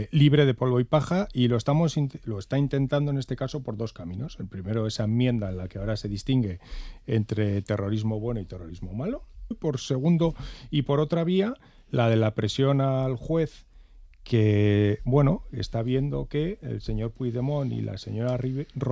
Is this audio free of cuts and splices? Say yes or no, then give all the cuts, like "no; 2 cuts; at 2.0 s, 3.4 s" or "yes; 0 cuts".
no; 1 cut; at 9.5 s